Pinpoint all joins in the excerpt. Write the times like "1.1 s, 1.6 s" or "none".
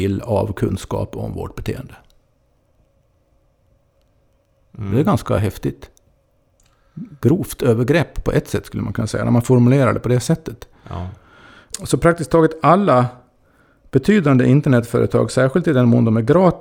none